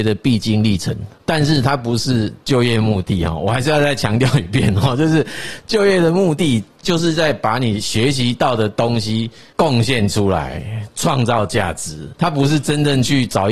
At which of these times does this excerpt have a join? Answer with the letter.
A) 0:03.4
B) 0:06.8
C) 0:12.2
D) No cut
D